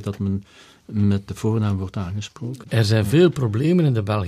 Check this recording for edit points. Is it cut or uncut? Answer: cut